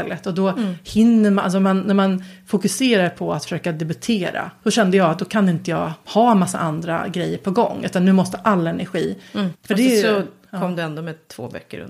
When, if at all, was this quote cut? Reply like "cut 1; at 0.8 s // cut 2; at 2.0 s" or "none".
cut 1; at 4.6 s // cut 2; at 9.5 s